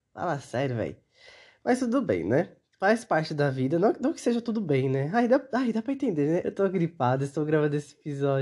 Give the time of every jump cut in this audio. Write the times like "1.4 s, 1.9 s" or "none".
6.4 s

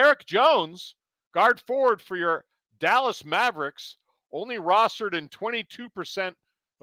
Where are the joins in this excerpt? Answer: none

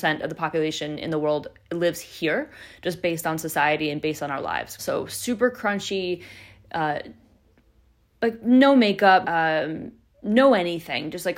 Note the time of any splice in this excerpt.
4.8 s, 9.2 s

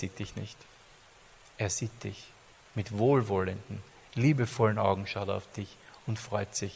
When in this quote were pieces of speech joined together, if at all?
none

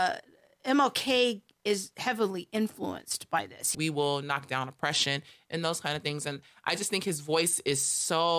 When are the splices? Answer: 3.7 s

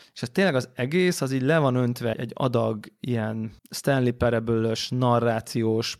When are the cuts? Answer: 2.1 s, 3.6 s

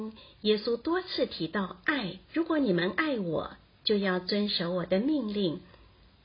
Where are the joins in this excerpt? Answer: 2.2 s

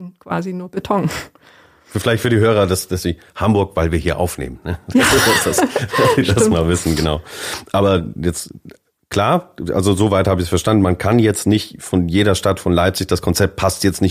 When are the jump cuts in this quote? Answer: none

